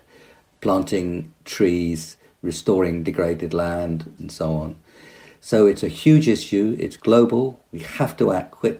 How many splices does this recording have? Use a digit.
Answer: 1